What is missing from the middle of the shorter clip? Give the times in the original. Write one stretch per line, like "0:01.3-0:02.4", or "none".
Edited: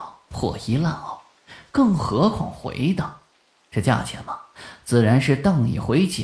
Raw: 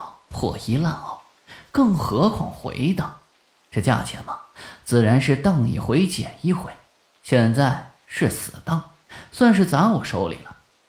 none

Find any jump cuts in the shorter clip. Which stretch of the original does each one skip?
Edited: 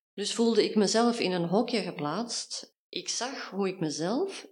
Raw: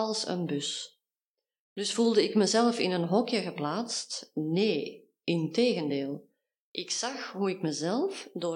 0:04.3-0:06.5

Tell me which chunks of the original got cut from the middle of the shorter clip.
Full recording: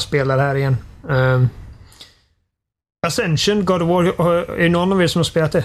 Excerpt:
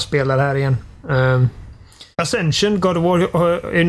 0:02.1-0:03.0

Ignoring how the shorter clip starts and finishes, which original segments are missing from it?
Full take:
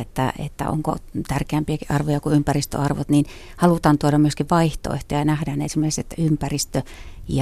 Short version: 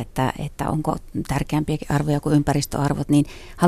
none

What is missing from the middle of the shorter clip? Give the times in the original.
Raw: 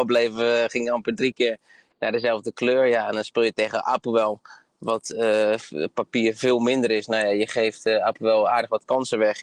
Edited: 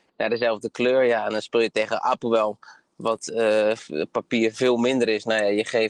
none

